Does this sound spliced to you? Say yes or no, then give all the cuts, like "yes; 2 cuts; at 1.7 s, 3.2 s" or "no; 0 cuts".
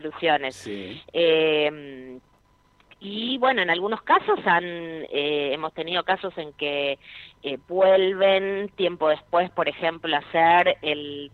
no; 0 cuts